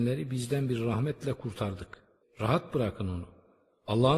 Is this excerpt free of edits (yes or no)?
no